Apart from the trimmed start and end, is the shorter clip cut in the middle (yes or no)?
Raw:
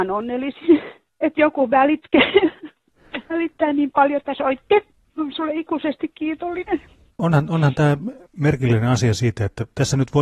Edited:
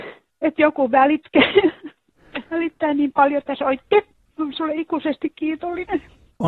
no